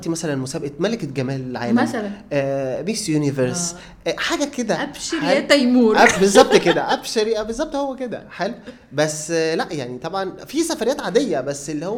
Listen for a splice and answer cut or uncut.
uncut